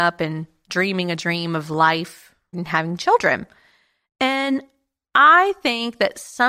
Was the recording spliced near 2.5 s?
yes; 1 cut; at 2.5 s

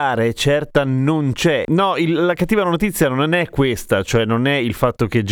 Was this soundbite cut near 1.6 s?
yes; 1 cut; at 1.6 s

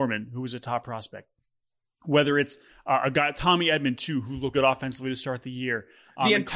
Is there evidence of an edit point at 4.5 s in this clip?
yes; 1 cut; at 4.5 s

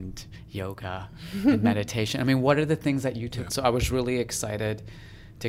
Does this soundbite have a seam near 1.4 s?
no; 1 cut; at 3.5 s

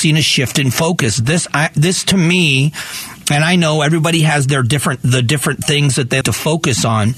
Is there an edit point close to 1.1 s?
no; 1 cut; at 6.2 s

